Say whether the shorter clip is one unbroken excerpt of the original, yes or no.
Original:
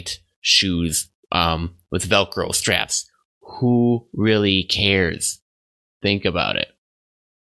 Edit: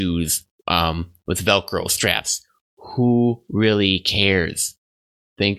yes